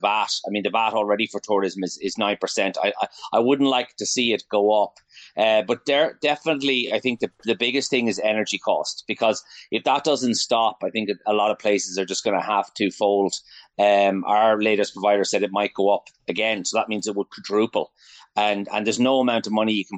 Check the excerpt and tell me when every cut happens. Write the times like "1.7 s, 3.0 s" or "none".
none